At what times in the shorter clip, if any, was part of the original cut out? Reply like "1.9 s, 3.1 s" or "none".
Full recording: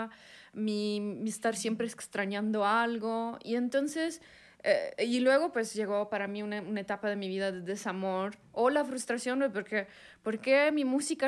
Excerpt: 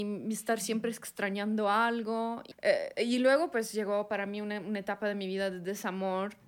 2.5 s